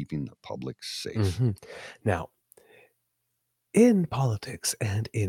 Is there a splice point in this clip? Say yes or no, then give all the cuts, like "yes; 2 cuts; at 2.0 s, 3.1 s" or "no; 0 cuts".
no; 0 cuts